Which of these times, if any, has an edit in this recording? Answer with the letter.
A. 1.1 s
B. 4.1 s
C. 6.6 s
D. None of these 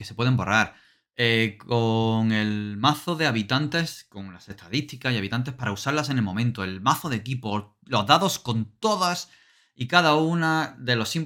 D